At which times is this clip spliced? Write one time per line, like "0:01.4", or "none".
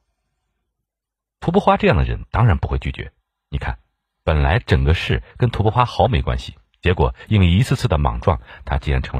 none